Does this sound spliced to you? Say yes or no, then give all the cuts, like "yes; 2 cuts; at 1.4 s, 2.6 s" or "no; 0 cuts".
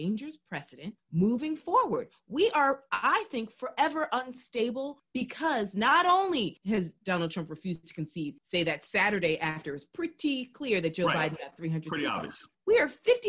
no; 0 cuts